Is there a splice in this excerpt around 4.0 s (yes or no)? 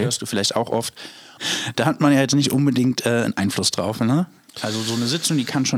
no